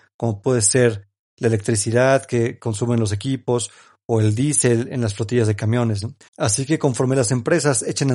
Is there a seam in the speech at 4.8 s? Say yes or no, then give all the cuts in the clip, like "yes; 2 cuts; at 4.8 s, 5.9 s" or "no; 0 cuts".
no; 1 cut; at 6.3 s